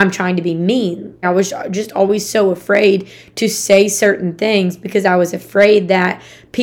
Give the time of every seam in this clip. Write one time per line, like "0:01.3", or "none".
0:01.2